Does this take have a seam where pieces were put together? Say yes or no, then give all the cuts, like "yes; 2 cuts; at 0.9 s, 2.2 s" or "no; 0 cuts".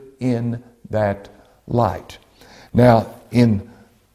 no; 0 cuts